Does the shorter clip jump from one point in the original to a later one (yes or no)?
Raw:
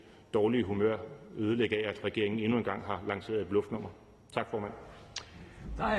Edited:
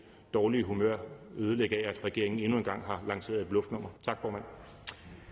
yes